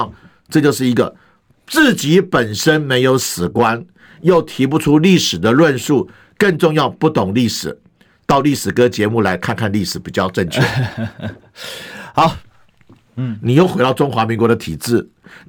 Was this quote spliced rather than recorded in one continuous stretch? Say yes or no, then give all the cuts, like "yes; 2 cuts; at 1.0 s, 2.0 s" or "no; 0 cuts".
yes; 1 cut; at 13.1 s